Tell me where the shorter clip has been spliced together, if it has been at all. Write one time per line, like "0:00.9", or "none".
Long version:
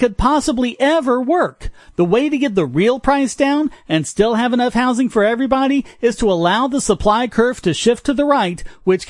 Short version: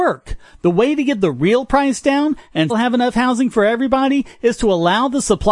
0:02.7